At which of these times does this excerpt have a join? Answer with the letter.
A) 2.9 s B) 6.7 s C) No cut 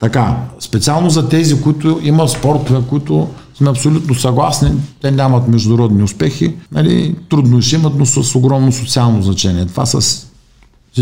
B